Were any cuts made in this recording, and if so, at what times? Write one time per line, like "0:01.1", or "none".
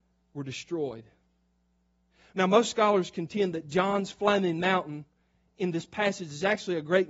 none